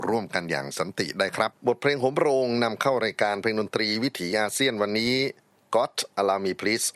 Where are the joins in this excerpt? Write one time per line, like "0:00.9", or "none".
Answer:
0:01.5